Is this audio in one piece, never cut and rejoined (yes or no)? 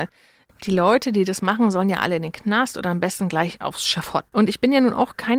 no